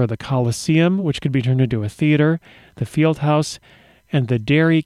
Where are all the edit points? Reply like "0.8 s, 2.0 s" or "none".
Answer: none